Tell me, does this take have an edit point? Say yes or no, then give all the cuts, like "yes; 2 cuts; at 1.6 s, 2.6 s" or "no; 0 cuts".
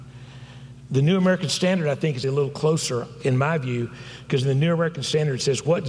yes; 2 cuts; at 2.2 s, 4.2 s